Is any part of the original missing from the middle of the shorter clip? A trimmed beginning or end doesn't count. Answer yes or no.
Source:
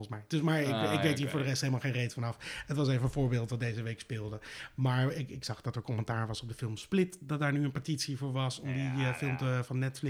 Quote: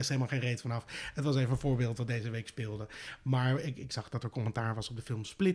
no